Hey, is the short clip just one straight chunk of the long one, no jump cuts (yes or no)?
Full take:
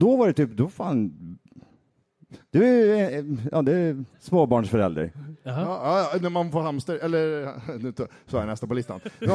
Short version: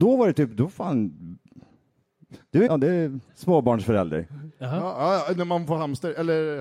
no